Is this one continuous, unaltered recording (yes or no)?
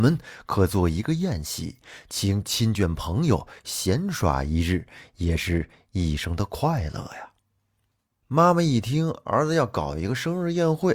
yes